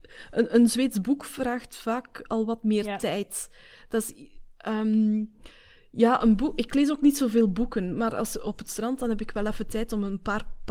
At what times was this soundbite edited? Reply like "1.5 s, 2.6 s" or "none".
none